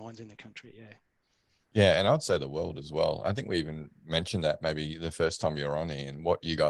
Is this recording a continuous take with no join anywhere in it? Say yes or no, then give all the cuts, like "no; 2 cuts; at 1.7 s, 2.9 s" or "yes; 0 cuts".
yes; 0 cuts